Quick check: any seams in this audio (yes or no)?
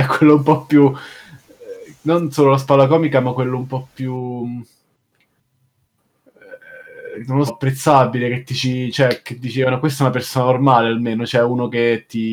yes